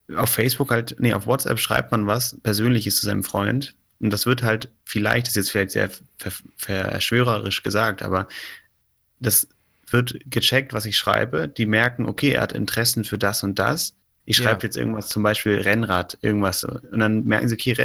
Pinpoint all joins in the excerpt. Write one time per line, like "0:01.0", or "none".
none